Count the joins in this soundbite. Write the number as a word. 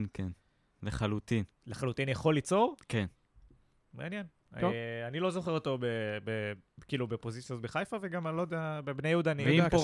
zero